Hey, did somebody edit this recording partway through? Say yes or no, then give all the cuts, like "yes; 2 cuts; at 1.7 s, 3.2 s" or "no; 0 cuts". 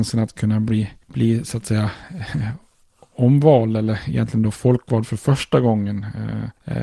no; 0 cuts